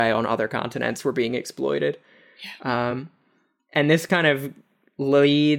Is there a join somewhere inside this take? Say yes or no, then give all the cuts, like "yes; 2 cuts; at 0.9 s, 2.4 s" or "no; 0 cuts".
no; 0 cuts